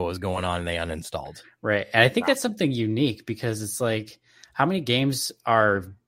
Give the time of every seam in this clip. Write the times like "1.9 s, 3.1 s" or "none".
none